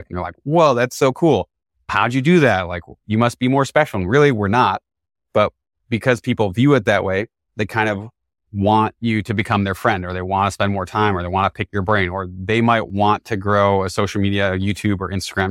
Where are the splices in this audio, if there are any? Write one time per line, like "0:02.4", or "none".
none